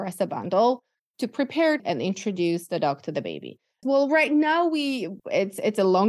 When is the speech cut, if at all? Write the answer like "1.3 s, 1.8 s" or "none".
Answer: 1.8 s, 3.8 s